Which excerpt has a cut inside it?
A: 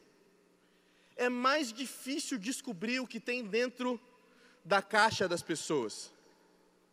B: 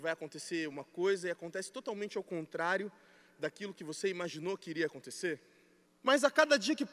B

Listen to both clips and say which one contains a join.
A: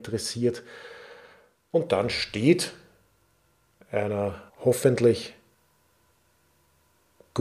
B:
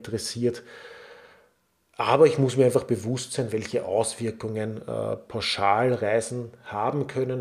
A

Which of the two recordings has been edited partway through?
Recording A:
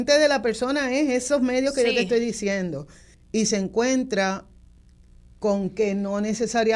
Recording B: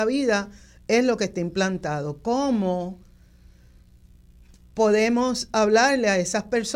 A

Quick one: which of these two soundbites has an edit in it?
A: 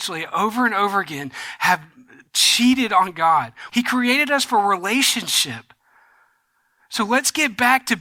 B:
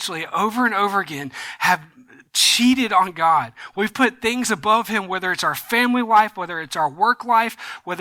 A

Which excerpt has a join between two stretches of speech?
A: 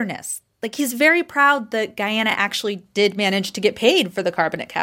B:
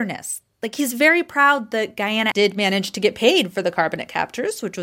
B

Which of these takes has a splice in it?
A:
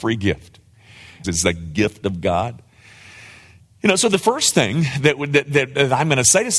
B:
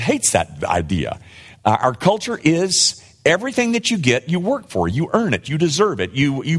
A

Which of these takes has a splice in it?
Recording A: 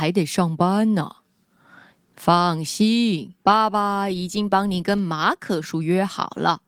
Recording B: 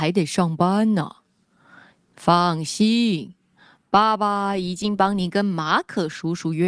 A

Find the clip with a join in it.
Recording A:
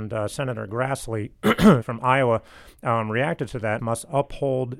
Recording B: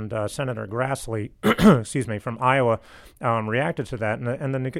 A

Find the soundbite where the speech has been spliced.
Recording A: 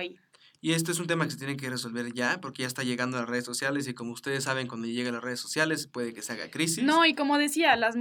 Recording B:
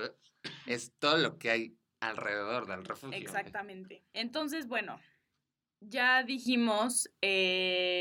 B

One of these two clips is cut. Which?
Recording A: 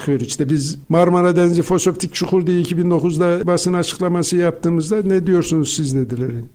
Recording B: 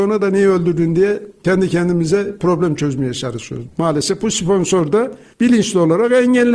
B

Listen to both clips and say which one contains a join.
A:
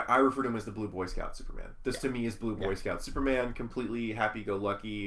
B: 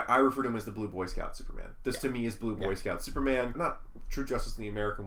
B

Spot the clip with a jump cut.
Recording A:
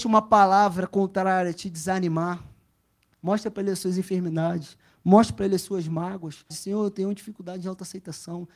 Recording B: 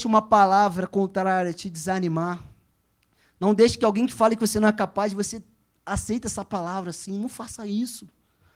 A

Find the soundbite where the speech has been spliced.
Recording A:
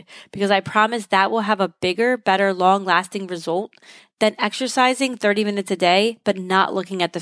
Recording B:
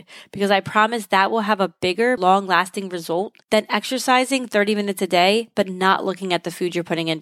B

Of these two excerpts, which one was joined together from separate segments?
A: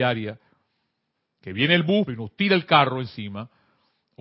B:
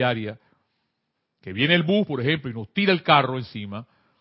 A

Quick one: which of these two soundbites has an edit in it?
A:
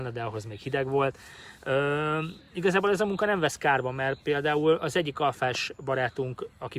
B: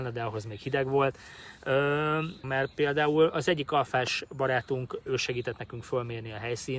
B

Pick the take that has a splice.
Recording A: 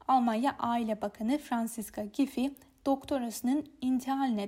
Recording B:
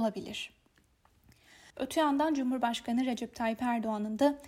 B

